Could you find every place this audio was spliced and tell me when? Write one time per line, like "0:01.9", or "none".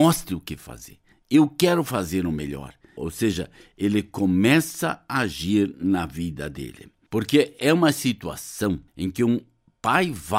0:03.0
0:07.1
0:08.9